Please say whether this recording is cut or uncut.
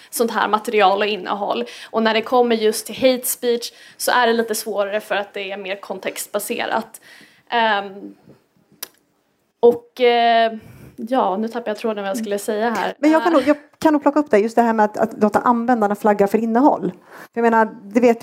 uncut